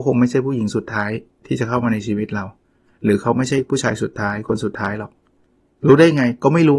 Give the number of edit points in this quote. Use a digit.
0